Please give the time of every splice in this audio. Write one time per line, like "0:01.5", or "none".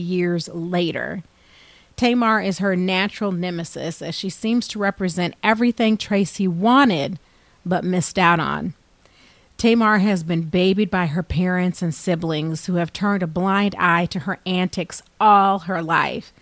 none